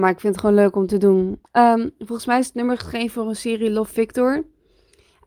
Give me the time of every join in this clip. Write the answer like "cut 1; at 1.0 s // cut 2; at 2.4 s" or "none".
cut 1; at 1.5 s

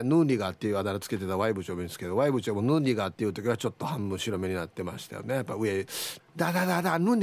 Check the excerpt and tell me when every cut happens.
cut 1; at 6.2 s

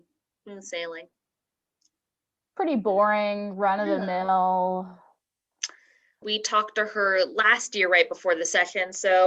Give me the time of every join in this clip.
cut 1; at 6.2 s

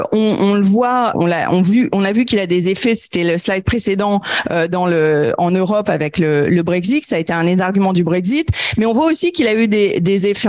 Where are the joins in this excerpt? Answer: cut 1; at 1.1 s

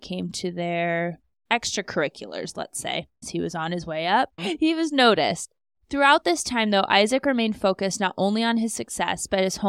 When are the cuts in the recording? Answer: cut 1; at 3.2 s // cut 2; at 4.4 s

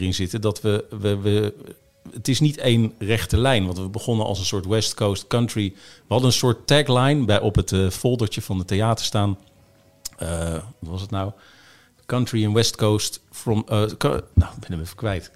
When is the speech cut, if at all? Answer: cut 1; at 14.3 s

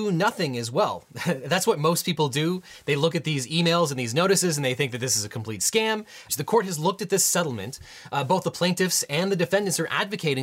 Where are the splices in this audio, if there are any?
cut 1; at 6.3 s

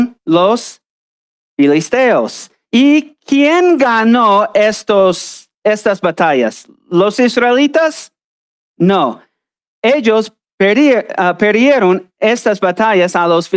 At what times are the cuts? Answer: none

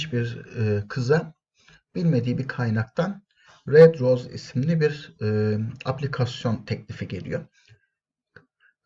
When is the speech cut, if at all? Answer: none

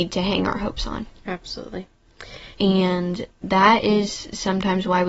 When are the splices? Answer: cut 1; at 2.5 s

